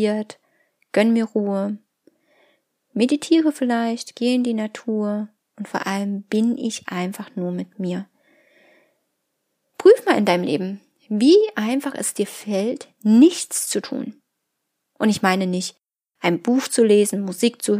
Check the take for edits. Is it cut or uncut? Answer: uncut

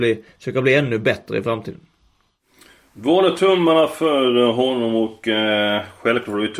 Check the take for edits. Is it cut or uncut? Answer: uncut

